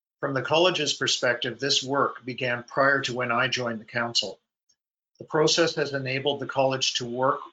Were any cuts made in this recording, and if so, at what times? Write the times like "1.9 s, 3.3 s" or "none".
none